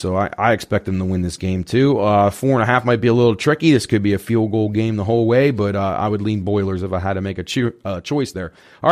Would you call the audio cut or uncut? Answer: uncut